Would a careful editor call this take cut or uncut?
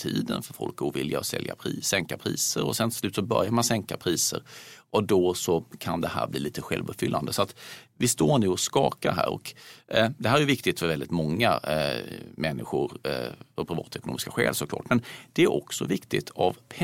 uncut